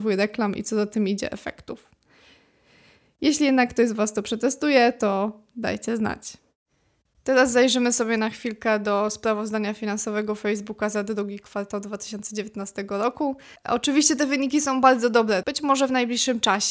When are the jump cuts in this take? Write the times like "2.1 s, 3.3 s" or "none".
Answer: 13.6 s, 15.4 s